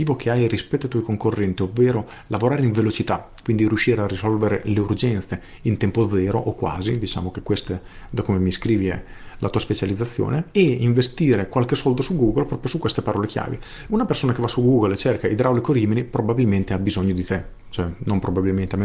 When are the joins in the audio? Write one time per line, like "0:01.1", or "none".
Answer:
0:13.9